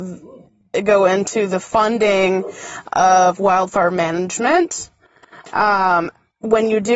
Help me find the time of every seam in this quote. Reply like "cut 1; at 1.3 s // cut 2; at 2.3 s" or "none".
none